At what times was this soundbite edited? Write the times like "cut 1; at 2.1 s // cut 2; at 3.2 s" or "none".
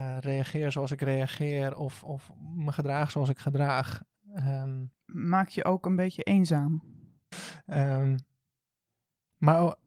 cut 1; at 4.9 s // cut 2; at 7.3 s